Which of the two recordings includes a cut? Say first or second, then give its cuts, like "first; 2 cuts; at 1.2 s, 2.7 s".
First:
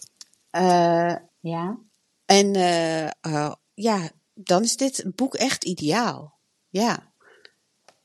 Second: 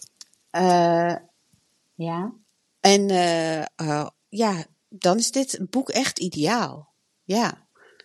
first; 1 cut; at 1.3 s